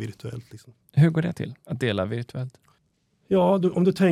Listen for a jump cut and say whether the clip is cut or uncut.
uncut